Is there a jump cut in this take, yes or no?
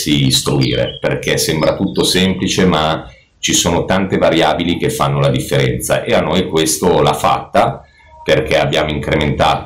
no